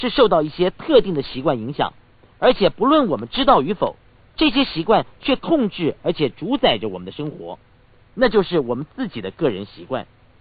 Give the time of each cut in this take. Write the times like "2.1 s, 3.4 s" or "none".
7.9 s